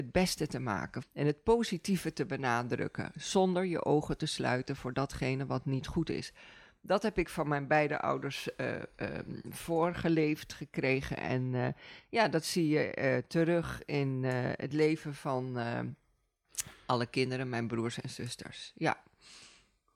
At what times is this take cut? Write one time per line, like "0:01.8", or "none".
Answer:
0:01.0